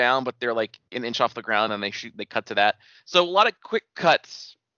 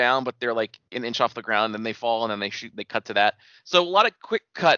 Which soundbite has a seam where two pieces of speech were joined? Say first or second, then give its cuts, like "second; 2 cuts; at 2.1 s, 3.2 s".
first; 1 cut; at 1.7 s